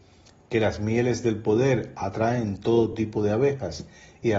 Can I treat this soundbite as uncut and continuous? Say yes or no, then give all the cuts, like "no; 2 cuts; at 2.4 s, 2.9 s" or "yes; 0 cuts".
yes; 0 cuts